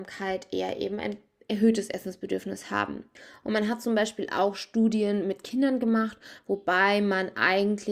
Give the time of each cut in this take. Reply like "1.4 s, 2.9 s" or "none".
none